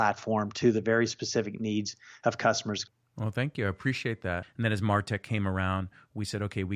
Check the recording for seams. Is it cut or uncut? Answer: cut